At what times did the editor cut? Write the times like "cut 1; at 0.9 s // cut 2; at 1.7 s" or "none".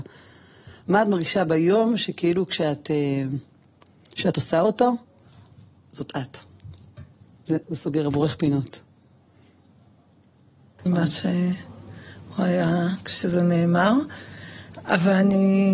cut 1; at 7.6 s // cut 2; at 10.9 s